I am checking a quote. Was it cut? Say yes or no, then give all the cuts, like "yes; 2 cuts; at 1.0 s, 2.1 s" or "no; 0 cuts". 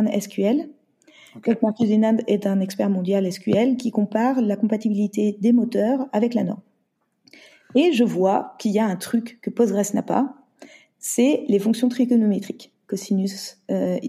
no; 0 cuts